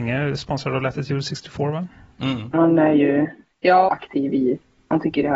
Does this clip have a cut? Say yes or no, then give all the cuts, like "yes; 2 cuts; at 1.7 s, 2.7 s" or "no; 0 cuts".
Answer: yes; 2 cuts; at 2.5 s, 3.9 s